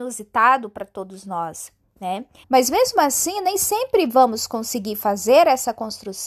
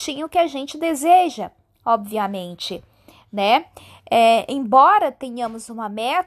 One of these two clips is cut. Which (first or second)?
first